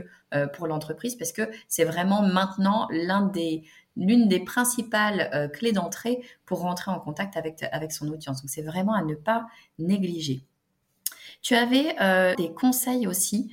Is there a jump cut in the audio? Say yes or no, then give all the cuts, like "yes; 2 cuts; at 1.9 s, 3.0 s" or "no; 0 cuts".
yes; 1 cut; at 12.3 s